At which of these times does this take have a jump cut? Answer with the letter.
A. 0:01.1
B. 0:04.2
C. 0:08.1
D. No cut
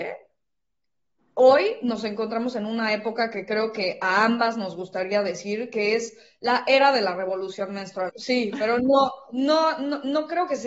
C